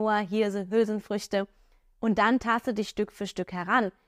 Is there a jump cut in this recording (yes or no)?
yes